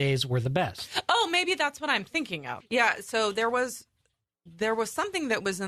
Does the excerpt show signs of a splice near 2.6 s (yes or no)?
yes